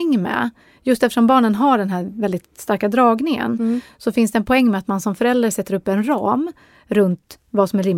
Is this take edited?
no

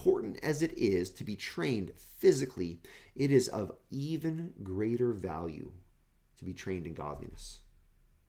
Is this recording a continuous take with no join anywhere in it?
yes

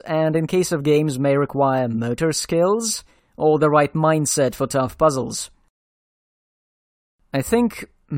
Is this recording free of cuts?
yes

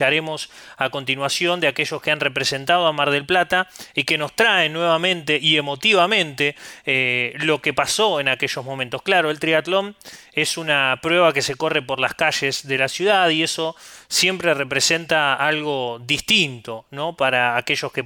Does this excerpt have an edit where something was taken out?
no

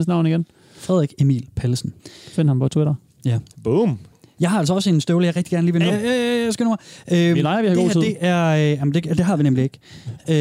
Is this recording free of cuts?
no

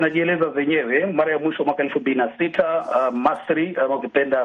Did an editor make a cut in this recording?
no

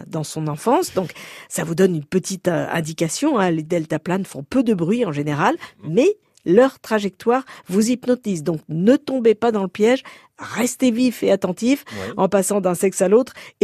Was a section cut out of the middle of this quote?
no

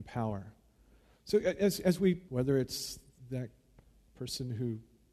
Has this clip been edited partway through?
yes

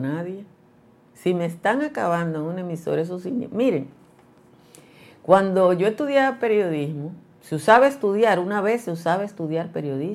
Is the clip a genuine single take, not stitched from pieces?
yes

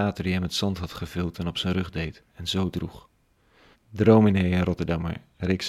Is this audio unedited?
no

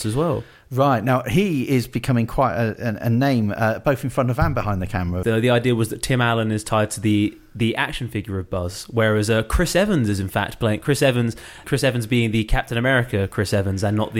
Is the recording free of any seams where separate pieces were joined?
no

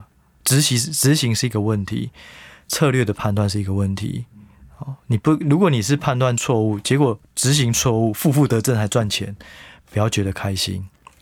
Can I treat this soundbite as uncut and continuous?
yes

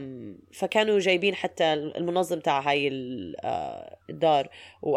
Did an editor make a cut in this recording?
yes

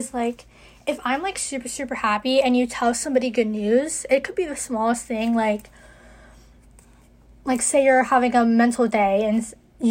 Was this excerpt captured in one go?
yes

